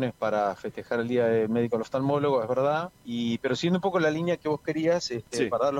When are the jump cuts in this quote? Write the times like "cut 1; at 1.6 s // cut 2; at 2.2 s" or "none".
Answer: cut 1; at 3.0 s